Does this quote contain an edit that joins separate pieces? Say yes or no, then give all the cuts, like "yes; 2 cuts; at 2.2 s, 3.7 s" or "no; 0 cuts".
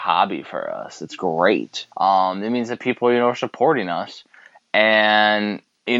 yes; 1 cut; at 1.9 s